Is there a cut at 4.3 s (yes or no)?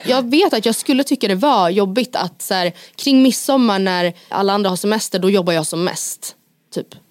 yes